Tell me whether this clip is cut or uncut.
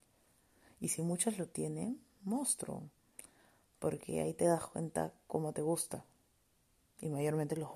uncut